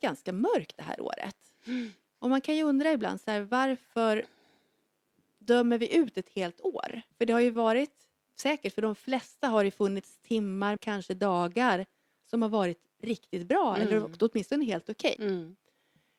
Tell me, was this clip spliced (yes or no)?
yes